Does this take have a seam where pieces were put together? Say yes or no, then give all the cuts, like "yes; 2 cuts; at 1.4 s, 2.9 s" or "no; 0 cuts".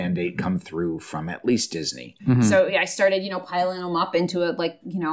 yes; 1 cut; at 2.2 s